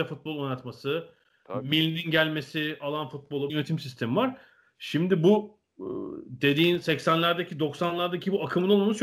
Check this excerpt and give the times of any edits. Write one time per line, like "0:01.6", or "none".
0:03.5